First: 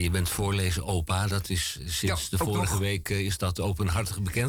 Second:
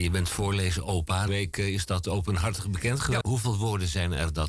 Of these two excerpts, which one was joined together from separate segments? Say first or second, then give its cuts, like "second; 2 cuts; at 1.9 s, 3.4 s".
second; 2 cuts; at 1.3 s, 3.2 s